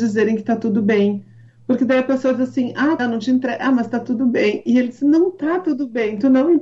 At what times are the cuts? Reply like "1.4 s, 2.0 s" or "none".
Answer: 3.0 s